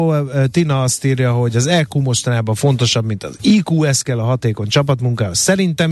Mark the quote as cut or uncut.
uncut